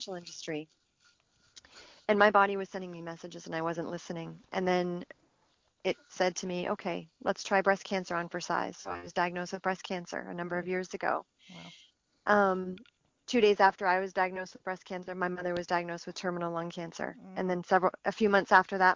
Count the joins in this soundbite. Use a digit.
0